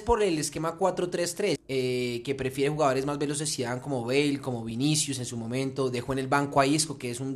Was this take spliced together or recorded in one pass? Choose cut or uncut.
cut